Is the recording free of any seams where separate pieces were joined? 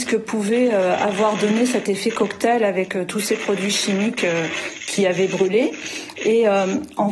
yes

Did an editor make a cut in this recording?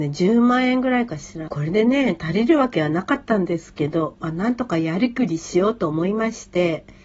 yes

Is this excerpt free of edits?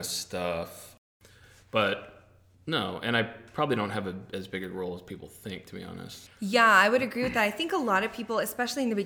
no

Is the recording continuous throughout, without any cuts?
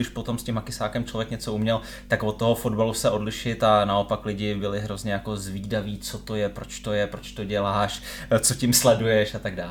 yes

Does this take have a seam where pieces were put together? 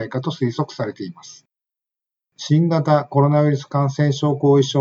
no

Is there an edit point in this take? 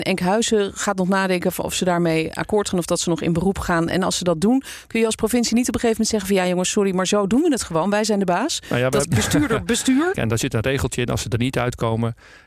yes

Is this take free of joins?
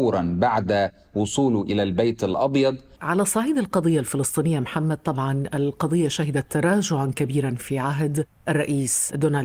no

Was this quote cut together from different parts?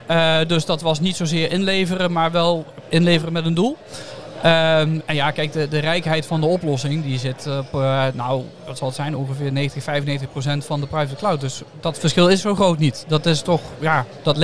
no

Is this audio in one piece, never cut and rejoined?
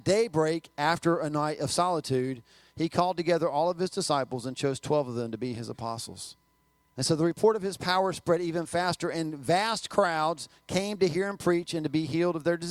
no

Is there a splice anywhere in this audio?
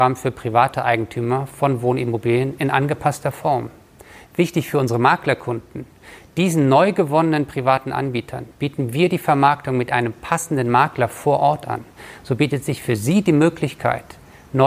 no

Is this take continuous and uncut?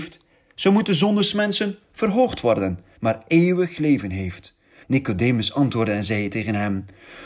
no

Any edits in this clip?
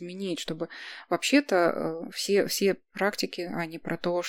no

